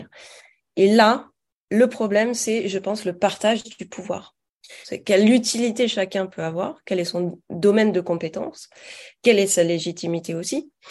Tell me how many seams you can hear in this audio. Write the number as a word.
one